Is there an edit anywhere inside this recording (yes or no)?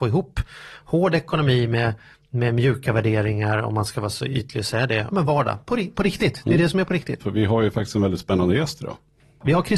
yes